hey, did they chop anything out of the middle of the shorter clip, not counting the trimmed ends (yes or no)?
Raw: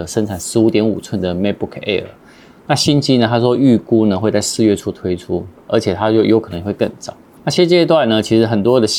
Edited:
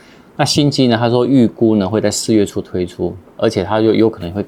no